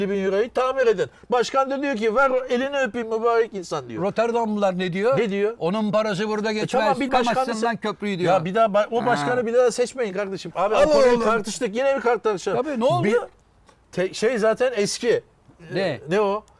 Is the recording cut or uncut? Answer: cut